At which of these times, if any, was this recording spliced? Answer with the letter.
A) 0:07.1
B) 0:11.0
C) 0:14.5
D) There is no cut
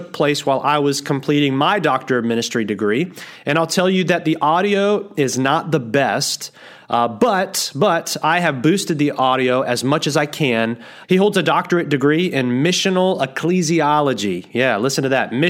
B